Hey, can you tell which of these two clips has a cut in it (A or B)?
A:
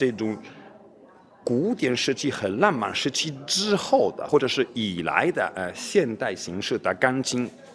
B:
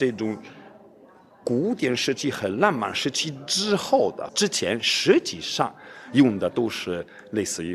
B